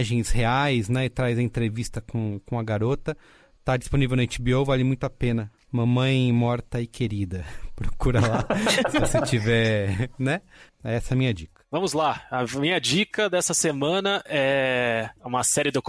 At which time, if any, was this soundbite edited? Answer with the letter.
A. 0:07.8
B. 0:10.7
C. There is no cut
B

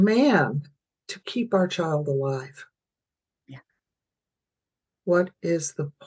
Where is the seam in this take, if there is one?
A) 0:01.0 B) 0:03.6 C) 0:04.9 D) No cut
C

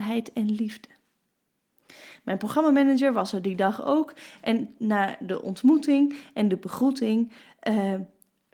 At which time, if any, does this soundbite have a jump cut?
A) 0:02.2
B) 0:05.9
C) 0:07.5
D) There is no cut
D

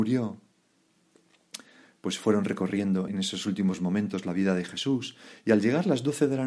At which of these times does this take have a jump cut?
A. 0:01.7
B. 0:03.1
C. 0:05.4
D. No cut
B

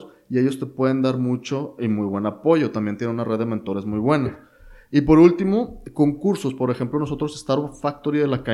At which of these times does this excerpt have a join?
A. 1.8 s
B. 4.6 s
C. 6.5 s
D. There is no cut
D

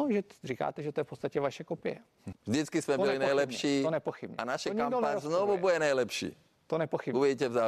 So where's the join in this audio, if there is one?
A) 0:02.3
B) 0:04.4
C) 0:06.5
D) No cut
A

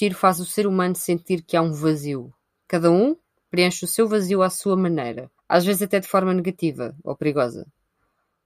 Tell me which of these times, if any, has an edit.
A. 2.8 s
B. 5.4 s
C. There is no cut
B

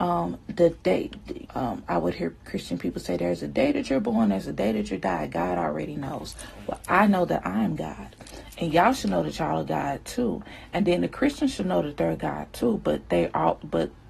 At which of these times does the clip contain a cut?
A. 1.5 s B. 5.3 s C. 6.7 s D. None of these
A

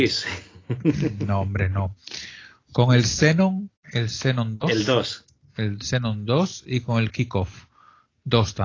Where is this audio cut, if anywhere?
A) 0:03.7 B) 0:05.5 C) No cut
A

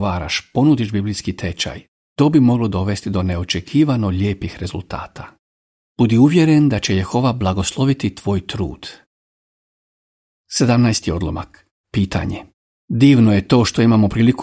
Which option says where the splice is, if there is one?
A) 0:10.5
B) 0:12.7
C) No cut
B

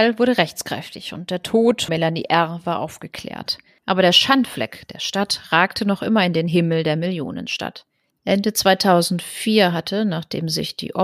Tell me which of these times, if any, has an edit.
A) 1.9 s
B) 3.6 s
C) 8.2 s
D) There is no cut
A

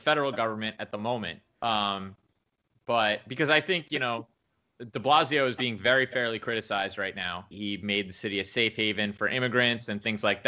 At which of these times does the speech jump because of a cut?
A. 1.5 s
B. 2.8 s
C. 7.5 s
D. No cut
C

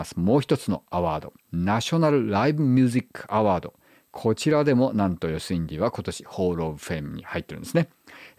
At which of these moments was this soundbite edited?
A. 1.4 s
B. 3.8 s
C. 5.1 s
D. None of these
A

